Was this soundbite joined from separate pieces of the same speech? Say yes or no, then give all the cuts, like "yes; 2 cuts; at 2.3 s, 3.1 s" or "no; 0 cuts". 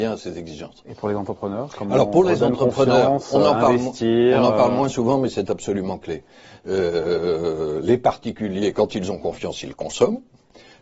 no; 0 cuts